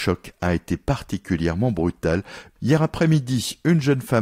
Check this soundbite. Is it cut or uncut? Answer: cut